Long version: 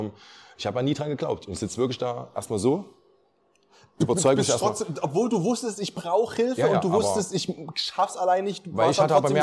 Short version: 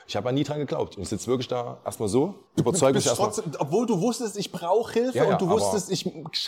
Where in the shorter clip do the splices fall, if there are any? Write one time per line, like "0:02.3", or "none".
0:02.5